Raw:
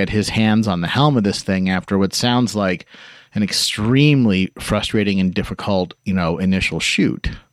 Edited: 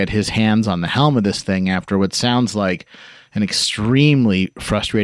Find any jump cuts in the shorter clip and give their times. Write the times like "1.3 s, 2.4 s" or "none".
none